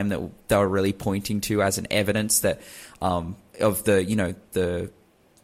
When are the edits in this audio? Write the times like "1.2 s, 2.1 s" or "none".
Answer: none